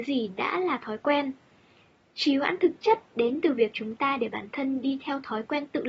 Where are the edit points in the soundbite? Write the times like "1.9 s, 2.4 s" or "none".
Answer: none